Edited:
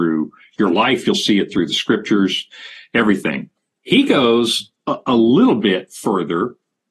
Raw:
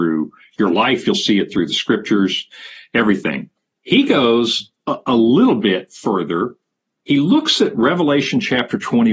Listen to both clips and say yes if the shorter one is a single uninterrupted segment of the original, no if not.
yes